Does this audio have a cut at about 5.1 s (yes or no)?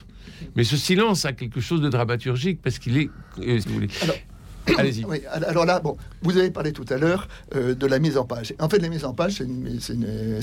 no